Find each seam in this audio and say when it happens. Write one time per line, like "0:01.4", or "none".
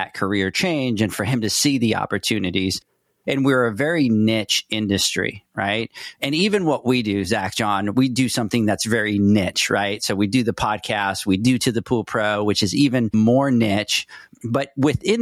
none